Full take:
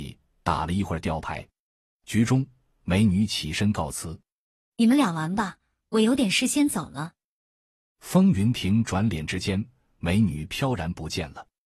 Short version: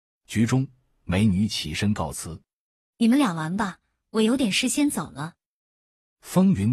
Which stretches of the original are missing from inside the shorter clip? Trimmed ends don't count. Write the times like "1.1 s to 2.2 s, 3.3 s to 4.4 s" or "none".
none